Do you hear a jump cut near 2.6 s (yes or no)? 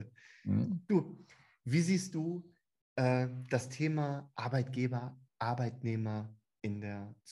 no